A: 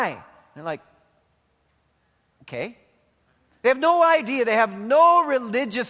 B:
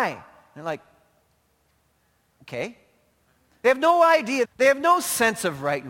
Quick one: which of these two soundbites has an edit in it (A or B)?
B